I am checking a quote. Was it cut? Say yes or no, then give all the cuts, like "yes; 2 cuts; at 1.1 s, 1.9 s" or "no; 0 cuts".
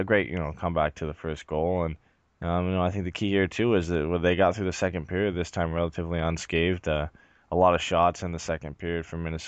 no; 0 cuts